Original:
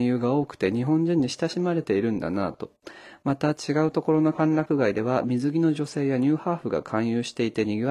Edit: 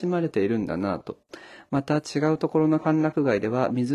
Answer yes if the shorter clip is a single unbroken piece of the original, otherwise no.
yes